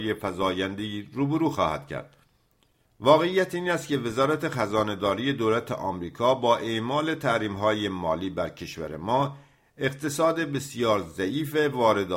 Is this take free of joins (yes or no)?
no